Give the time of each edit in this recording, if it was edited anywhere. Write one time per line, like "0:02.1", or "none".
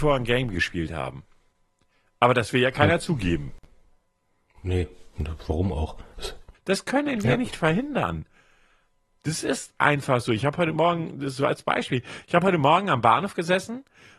0:06.5